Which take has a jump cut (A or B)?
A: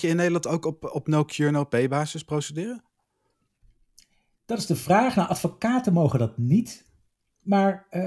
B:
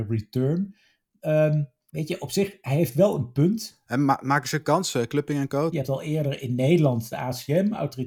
B